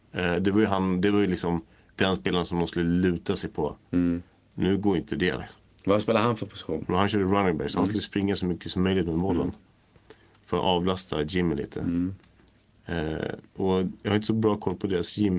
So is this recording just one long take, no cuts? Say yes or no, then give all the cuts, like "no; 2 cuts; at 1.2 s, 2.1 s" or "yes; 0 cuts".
yes; 0 cuts